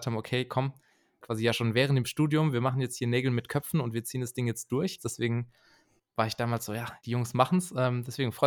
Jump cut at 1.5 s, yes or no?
no